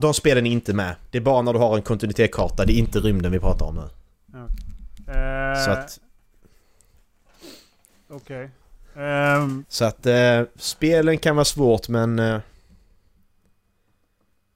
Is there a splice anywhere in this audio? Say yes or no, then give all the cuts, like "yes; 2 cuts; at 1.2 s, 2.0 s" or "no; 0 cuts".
no; 0 cuts